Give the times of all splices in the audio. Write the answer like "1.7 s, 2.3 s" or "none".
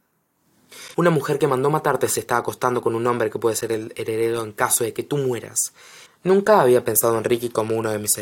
0.9 s, 6.1 s

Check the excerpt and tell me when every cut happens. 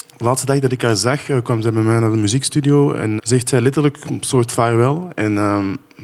3.2 s

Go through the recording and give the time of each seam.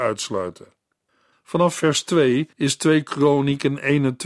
1.3 s, 2.5 s

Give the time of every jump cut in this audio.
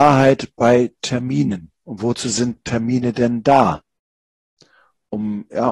1.7 s

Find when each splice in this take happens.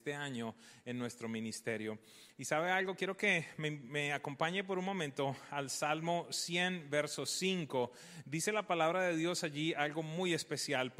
none

